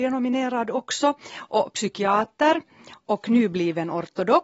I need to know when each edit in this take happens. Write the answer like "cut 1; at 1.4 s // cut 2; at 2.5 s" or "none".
none